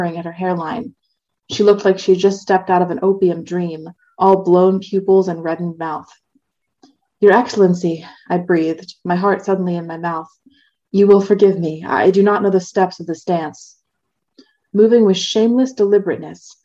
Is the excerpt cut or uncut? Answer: uncut